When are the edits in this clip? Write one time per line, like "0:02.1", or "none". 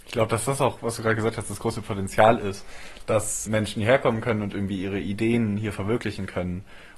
0:03.5